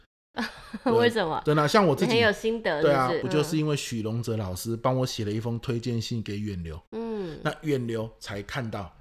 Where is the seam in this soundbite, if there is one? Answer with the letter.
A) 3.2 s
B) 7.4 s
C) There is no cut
A